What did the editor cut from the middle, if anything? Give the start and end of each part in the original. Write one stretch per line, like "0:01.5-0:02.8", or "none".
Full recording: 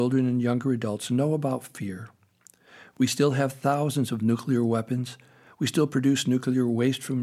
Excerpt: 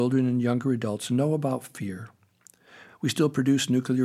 0:02.9-0:05.5